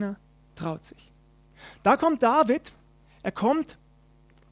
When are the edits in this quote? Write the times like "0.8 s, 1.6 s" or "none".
none